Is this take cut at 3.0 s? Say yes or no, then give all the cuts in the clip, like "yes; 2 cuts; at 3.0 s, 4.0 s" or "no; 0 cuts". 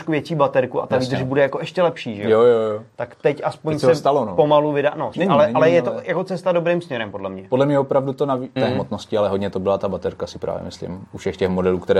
no; 2 cuts; at 5.1 s, 8.6 s